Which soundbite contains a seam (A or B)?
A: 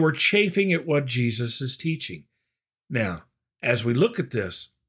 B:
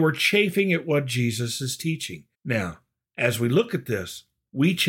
B